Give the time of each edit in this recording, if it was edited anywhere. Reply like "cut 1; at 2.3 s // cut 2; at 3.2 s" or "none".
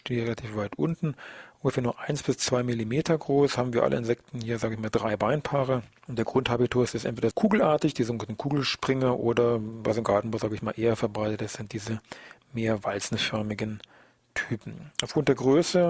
cut 1; at 7.3 s

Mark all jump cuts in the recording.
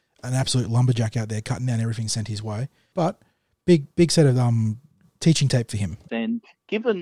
cut 1; at 2.9 s // cut 2; at 6.1 s

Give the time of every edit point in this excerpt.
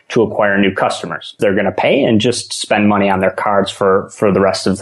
cut 1; at 1.4 s

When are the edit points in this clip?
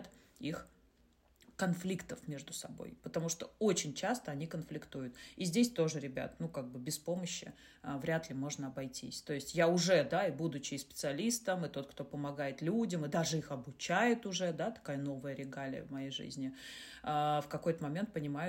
none

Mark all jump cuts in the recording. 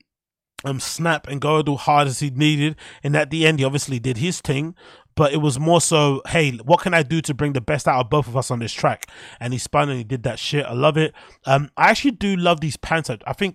none

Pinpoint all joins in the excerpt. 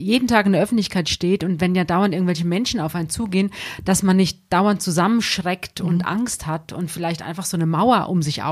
none

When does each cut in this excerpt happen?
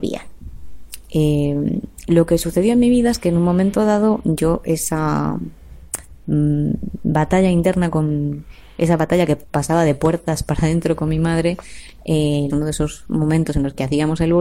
cut 1; at 1.0 s // cut 2; at 12.5 s

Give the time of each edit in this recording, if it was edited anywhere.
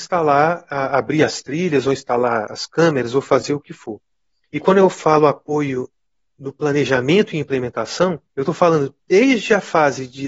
cut 1; at 4.4 s // cut 2; at 8.3 s

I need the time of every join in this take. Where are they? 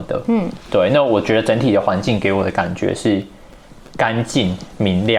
none

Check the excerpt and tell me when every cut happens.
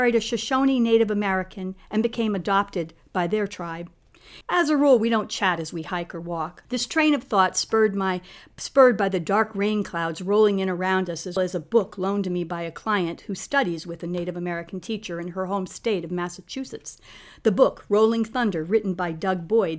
cut 1; at 4.4 s // cut 2; at 6.7 s // cut 3; at 11.4 s

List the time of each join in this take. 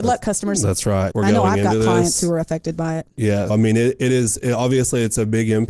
cut 1; at 1.1 s // cut 2; at 3.5 s

